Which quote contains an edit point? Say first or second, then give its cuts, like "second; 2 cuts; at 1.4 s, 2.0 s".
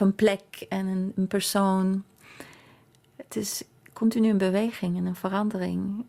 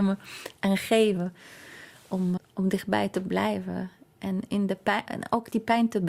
second; 2 cuts; at 2.4 s, 5.1 s